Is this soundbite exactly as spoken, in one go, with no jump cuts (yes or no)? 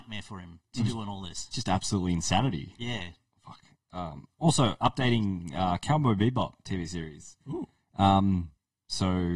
yes